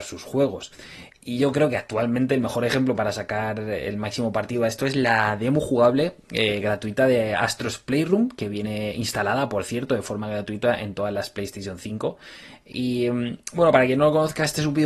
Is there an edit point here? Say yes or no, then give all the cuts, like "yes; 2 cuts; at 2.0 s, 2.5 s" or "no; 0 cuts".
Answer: no; 0 cuts